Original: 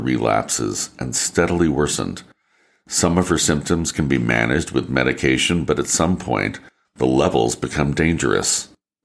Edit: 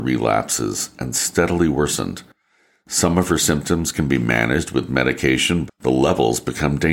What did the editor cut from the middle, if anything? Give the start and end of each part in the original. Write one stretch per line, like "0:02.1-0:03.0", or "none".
0:05.7-0:06.8